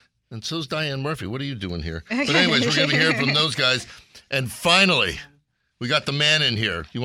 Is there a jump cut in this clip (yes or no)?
no